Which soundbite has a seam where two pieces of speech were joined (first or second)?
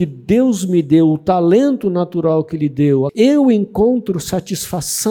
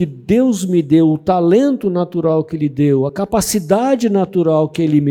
first